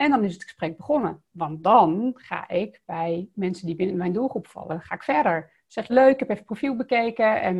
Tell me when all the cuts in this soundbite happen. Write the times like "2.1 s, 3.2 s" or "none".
5.9 s

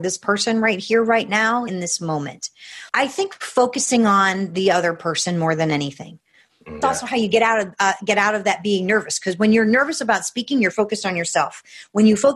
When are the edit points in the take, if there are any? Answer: 1.7 s, 2.9 s, 6.8 s

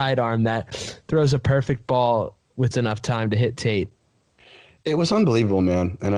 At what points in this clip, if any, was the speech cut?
2.7 s

